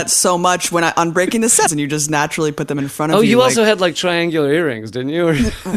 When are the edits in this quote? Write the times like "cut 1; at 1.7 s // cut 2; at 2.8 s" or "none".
cut 1; at 1.7 s